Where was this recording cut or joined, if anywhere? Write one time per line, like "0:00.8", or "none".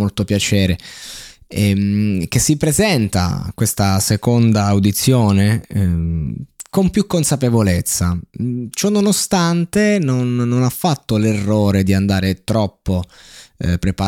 none